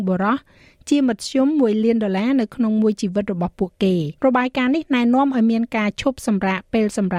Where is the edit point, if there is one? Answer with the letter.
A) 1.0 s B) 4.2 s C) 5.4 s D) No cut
B